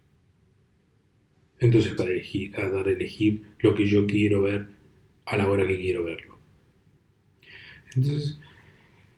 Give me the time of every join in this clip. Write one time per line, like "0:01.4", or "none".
0:02.0